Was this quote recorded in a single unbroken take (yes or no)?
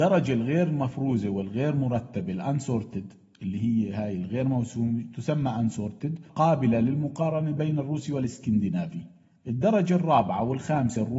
yes